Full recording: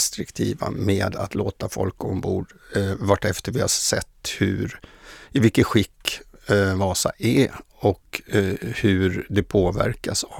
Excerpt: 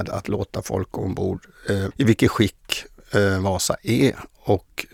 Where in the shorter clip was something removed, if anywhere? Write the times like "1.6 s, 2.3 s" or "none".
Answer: 1.9 s